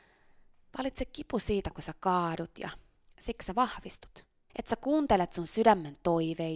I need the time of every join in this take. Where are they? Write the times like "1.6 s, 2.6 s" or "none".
4.5 s